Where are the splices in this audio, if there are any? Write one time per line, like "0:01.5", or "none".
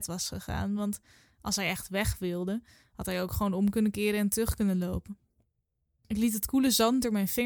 none